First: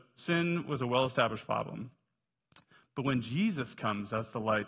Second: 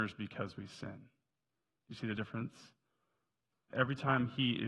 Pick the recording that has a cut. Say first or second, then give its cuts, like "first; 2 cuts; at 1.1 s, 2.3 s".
second; 1 cut; at 3.7 s